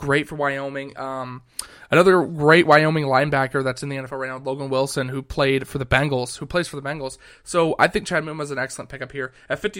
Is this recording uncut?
yes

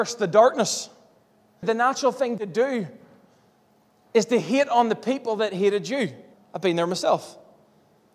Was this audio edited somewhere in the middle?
yes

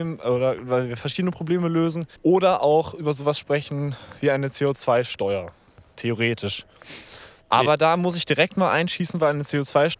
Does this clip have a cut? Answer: yes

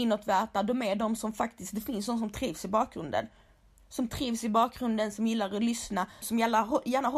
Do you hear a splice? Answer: yes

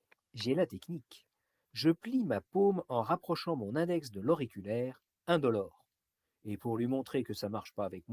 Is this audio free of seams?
yes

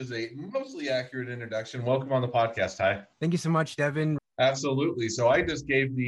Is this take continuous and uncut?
no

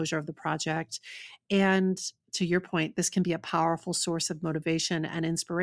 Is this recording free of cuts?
yes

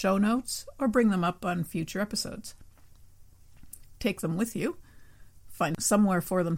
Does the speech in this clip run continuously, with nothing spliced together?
no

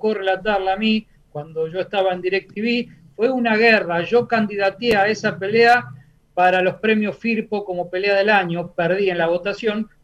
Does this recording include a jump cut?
no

